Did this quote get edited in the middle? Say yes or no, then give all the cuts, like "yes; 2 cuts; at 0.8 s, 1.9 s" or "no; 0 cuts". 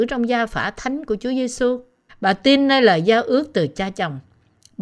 yes; 1 cut; at 2.1 s